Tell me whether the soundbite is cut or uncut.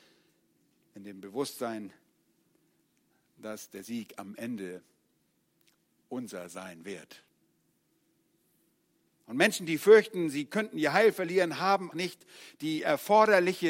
cut